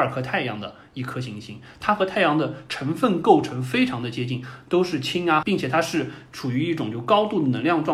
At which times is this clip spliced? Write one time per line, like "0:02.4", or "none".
0:05.4